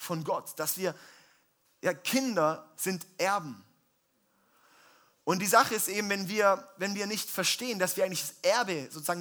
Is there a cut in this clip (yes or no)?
no